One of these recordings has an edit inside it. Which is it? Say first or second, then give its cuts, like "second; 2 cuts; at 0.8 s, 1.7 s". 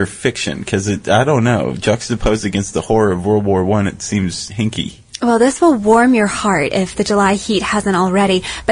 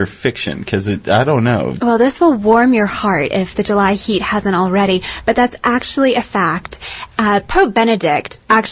second; 1 cut; at 1.8 s